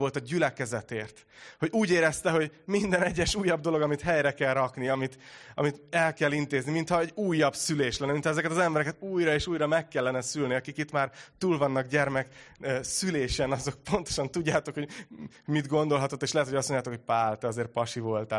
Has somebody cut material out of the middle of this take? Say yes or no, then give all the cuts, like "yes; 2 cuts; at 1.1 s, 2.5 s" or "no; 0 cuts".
no; 0 cuts